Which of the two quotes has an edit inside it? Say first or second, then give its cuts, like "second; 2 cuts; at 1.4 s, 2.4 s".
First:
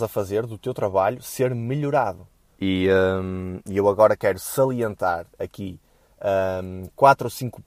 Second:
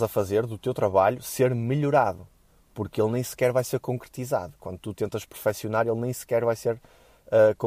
first; 1 cut; at 2.6 s